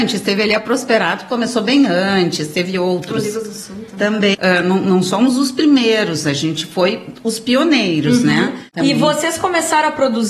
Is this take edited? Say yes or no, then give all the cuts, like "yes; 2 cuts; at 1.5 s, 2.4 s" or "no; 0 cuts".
yes; 1 cut; at 4.3 s